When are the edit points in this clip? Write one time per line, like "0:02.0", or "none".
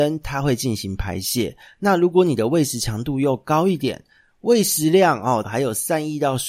0:05.4